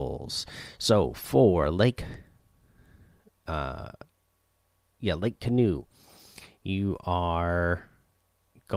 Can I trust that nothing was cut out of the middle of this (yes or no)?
yes